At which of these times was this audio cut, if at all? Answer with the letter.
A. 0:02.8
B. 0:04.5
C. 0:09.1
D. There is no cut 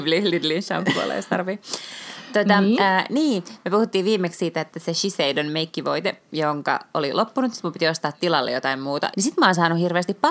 C